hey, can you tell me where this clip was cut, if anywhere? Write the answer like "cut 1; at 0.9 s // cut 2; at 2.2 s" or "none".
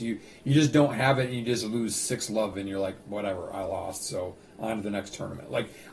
cut 1; at 2.5 s